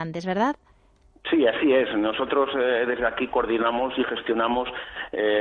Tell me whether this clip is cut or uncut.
uncut